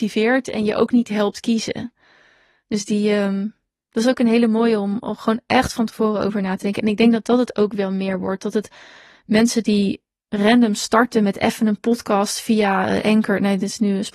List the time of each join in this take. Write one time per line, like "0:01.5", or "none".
0:10.3